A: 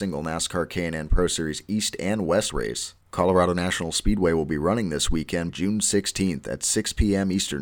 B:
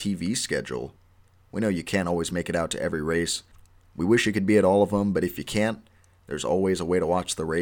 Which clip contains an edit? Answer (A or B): A